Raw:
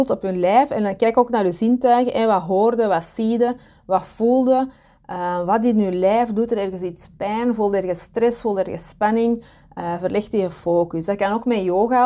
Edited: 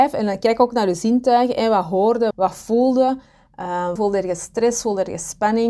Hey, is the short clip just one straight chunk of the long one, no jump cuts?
no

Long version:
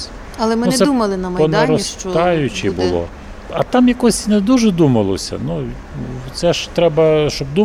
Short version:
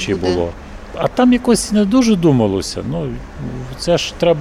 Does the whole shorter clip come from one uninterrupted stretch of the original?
yes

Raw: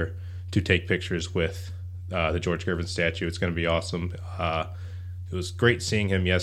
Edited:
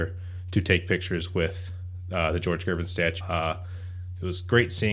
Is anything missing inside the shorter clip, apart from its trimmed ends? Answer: yes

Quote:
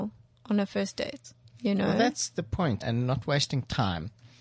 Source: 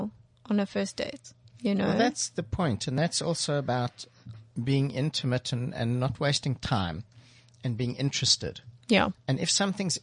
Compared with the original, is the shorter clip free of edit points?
no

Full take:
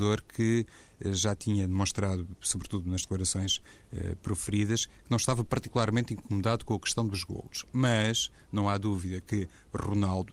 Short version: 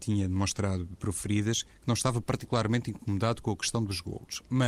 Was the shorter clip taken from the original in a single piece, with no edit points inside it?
no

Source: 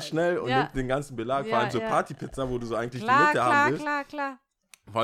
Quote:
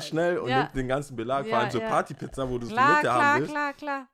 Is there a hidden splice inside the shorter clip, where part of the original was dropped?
yes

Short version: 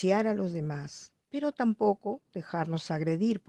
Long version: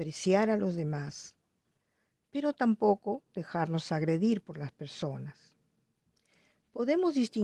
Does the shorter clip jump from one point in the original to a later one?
yes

